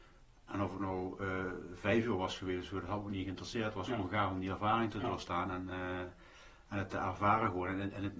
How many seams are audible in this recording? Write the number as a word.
zero